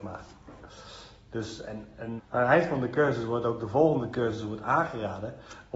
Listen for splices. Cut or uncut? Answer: cut